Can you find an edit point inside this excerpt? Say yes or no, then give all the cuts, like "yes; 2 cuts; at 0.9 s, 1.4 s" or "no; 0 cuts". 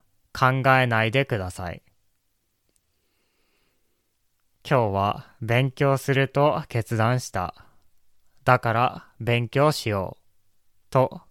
no; 0 cuts